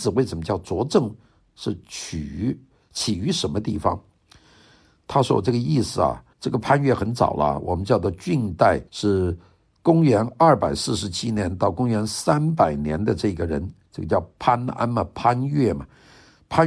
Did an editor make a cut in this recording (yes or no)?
yes